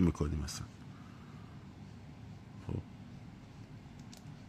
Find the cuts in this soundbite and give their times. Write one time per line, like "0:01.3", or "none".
none